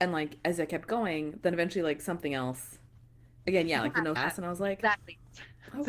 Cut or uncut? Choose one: cut